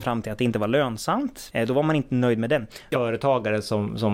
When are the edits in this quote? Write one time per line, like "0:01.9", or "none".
0:01.5
0:02.9